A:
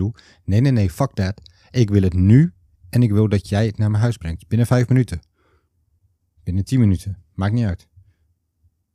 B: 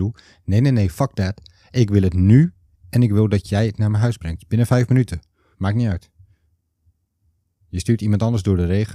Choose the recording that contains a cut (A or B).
B